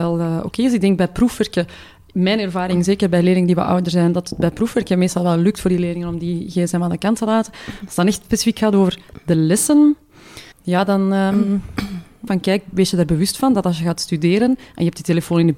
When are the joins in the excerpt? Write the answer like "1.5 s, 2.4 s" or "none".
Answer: 10.5 s, 12.3 s